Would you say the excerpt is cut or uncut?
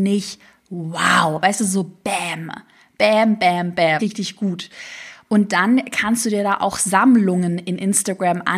cut